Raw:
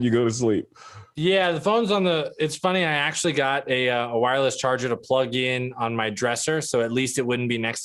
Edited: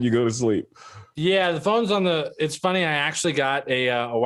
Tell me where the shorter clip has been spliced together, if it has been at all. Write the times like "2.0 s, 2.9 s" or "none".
none